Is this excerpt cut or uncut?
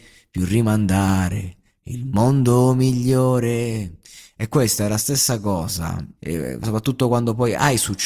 cut